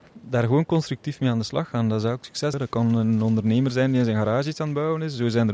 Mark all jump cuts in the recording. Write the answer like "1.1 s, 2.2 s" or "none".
2.5 s